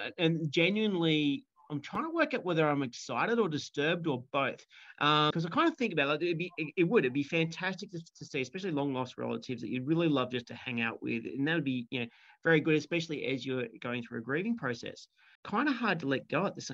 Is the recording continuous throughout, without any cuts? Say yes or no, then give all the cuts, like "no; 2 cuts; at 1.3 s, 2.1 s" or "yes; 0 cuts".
no; 2 cuts; at 5.3 s, 15.4 s